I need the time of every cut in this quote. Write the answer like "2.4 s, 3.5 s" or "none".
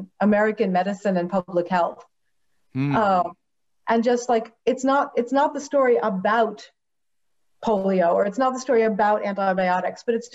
none